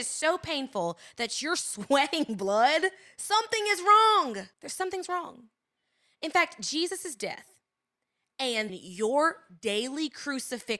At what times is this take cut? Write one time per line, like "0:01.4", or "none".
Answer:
0:04.5
0:08.7